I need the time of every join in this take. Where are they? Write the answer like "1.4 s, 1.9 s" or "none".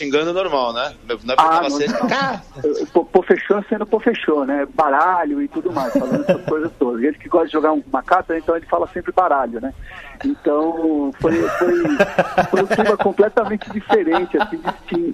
none